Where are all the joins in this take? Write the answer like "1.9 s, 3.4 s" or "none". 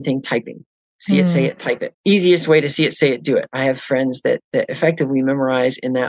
1.9 s

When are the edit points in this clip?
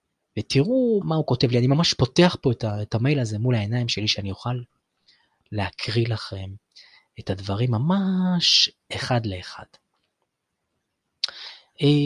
1.0 s

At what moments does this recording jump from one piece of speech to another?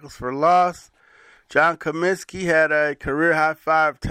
none

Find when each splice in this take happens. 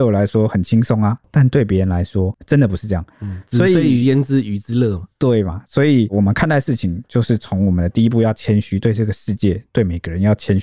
none

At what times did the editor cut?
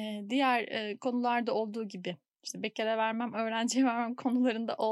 3.3 s

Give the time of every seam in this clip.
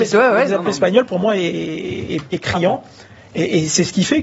none

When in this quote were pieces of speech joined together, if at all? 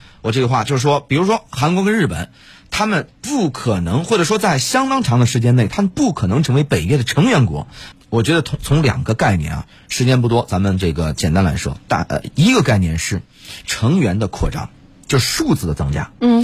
7.9 s

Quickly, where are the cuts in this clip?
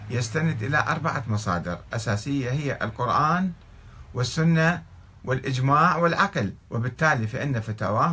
6.6 s

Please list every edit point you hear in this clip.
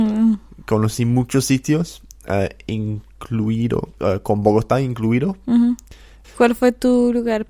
4.0 s, 6.2 s

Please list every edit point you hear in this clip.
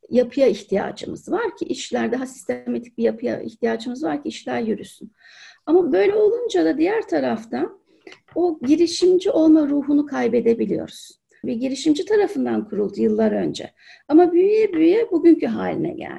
11.4 s

